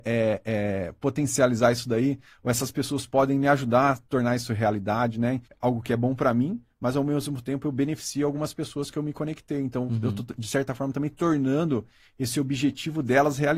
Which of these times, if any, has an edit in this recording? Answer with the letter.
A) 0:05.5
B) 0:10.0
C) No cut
A